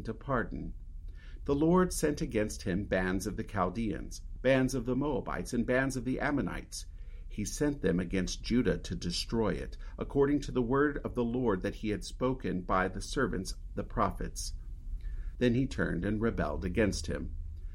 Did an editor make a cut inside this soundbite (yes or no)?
yes